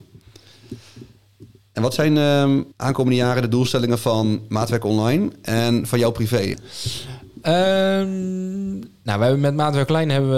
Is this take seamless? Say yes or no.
no